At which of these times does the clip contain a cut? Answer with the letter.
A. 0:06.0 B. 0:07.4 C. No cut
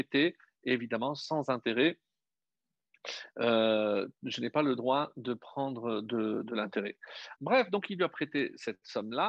B